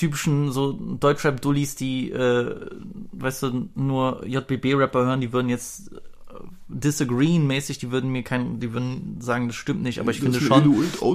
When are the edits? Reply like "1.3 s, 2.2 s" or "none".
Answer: none